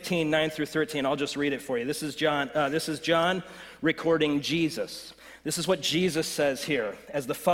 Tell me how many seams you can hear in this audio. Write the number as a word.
zero